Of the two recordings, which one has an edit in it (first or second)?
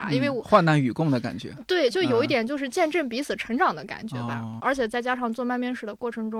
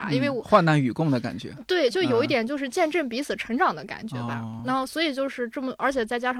first